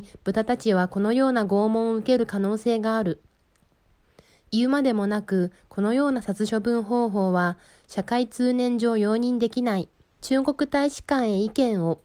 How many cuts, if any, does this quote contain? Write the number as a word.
one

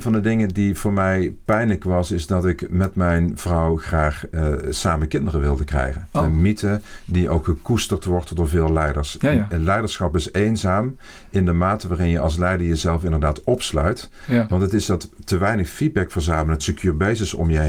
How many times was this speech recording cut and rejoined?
three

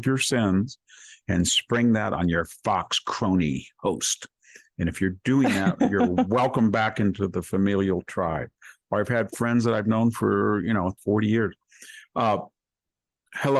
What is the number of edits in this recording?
one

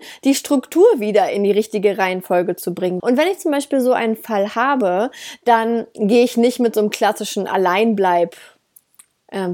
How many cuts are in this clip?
one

